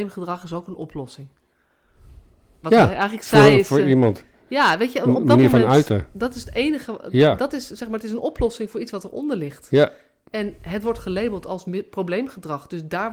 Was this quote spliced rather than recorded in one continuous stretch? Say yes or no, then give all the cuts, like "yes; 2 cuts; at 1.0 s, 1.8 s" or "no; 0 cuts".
yes; 1 cut; at 2.6 s